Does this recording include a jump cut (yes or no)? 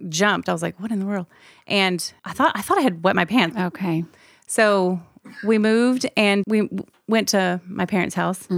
yes